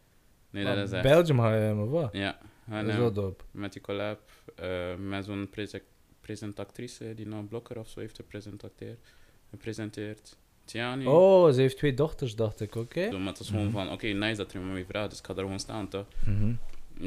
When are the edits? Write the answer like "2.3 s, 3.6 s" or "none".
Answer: 13.1 s